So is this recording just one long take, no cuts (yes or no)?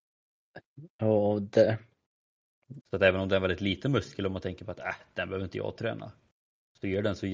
no